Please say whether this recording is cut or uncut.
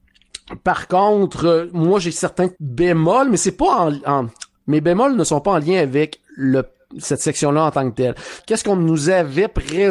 cut